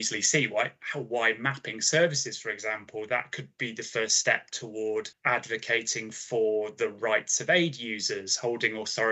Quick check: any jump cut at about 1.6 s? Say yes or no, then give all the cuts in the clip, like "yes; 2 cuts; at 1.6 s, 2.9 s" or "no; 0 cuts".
no; 0 cuts